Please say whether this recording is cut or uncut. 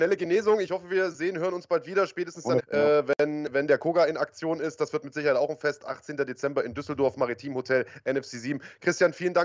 cut